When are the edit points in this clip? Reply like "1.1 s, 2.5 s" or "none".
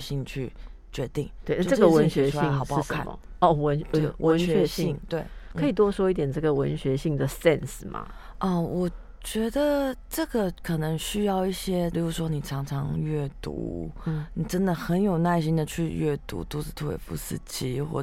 11.9 s